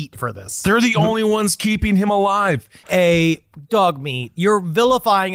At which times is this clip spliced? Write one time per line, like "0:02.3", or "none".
0:02.8